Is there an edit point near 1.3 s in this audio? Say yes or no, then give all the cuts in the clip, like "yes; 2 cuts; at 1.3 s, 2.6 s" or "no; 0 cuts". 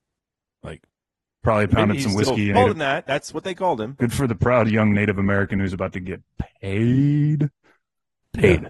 no; 2 cuts; at 2.5 s, 4.0 s